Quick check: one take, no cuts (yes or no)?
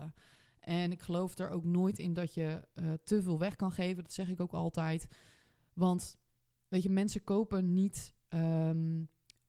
yes